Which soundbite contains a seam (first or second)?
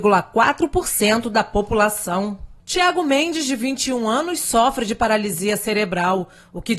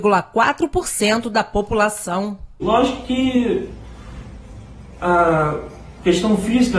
second